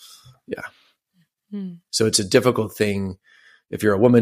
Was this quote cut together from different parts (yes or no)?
yes